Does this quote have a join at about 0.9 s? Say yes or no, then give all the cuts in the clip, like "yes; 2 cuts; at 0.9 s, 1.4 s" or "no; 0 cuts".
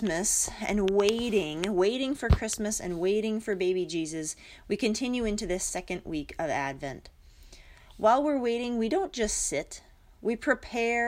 no; 0 cuts